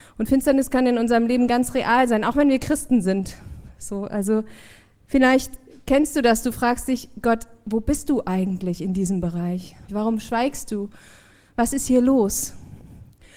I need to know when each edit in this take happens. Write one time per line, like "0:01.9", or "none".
0:09.9